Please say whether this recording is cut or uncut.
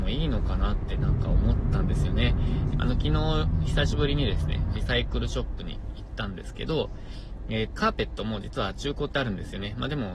cut